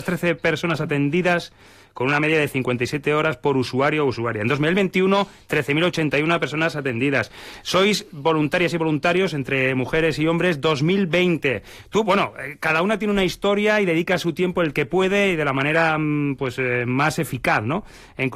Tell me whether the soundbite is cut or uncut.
uncut